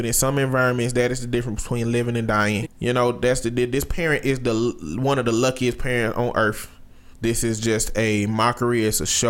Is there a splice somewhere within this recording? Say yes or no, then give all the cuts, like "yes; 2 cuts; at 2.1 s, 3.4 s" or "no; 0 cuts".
yes; 2 cuts; at 2.6 s, 7.1 s